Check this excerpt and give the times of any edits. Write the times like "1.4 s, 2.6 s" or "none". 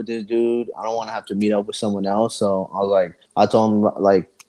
none